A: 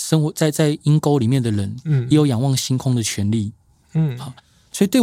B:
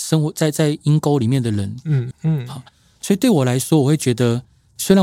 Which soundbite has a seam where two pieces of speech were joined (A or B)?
B